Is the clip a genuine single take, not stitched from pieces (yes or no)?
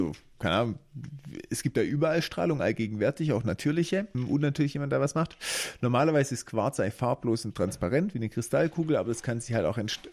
no